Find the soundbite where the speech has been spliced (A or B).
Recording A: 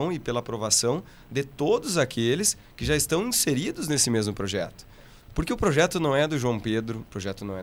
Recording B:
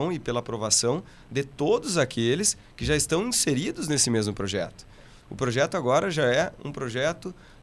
B